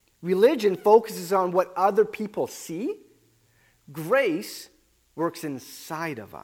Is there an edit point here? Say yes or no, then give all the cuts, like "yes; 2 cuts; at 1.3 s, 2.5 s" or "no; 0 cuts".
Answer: no; 0 cuts